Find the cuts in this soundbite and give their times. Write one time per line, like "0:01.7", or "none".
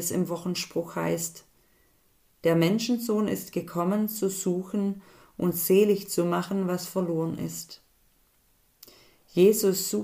none